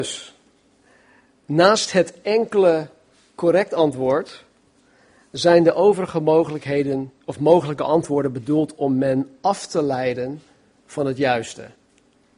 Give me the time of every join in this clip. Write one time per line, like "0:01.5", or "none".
none